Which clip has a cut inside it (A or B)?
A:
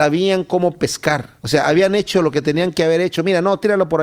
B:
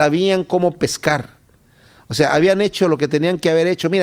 A